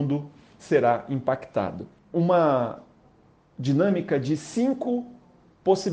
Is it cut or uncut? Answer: cut